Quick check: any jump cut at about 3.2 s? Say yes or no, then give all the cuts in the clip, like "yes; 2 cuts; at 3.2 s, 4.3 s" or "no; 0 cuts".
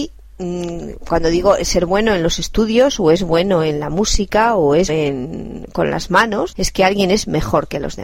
no; 2 cuts; at 4.9 s, 6.5 s